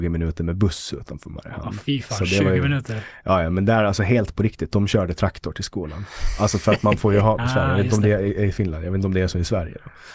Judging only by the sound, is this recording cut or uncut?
cut